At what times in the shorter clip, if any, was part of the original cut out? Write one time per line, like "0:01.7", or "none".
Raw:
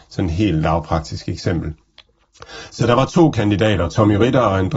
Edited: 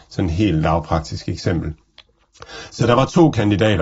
none